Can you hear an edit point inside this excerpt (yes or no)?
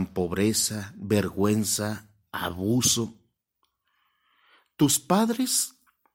no